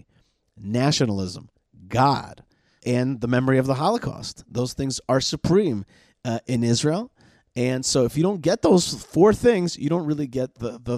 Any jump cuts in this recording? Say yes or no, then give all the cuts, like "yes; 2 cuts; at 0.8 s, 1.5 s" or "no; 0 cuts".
yes; 1 cut; at 2.8 s